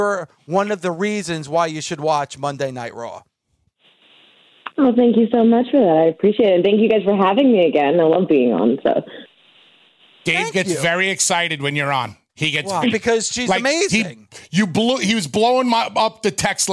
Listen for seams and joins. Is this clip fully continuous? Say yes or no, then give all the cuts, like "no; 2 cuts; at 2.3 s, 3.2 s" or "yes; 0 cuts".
no; 1 cut; at 12.8 s